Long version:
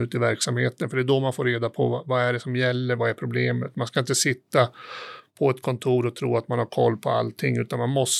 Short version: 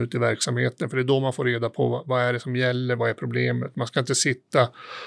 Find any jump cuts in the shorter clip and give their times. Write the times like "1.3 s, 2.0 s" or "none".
none